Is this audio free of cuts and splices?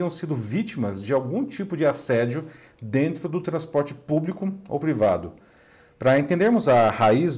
yes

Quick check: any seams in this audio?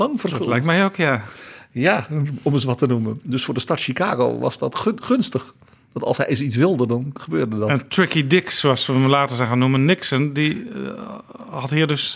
no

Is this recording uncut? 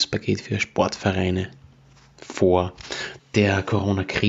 no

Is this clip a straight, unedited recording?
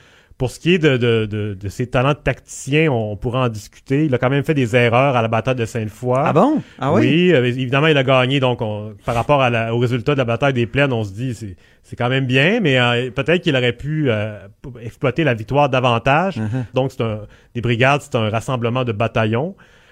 no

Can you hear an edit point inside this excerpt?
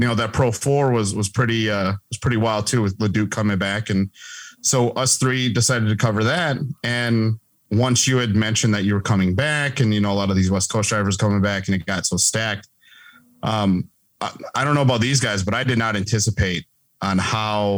no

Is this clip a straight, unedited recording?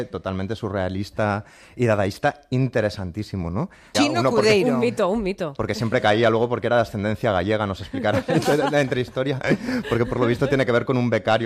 no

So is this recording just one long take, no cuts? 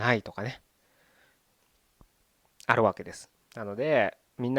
no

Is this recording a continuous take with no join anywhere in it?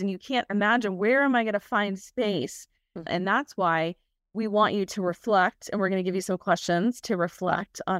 no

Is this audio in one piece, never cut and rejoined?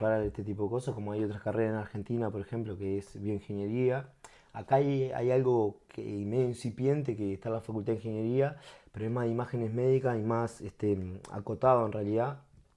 yes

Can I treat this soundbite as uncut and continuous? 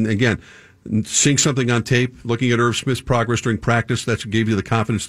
yes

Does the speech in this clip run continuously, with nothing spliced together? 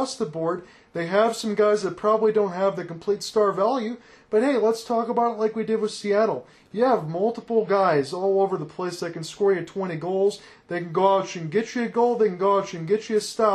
yes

